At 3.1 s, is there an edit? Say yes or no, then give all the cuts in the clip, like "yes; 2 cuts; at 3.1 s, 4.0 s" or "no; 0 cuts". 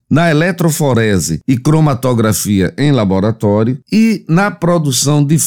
no; 0 cuts